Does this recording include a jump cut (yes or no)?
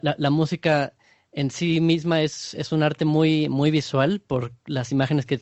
no